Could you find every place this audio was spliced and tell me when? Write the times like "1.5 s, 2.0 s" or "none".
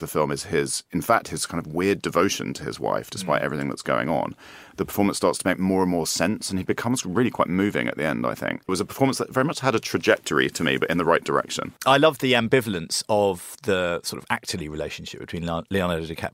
none